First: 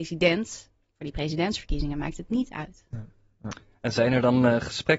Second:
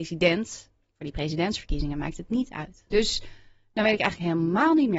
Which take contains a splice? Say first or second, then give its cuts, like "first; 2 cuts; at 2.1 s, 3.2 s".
second; 1 cut; at 2.9 s